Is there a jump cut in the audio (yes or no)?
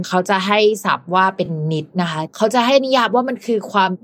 no